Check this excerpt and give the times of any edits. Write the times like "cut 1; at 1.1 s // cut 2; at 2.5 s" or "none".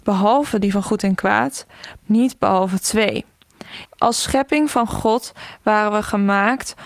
cut 1; at 2.0 s // cut 2; at 3.8 s